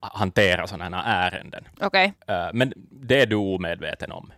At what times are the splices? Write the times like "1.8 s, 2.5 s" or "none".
2.2 s